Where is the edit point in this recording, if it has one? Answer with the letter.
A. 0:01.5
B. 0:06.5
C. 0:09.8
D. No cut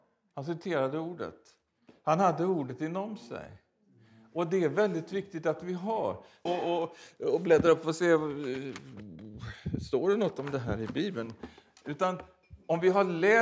B